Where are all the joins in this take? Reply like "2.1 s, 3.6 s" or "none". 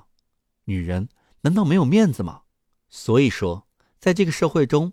2.8 s